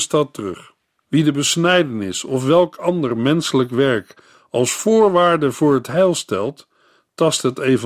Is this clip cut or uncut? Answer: cut